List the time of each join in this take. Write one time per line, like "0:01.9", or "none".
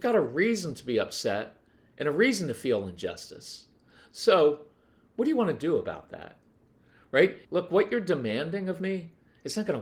0:07.4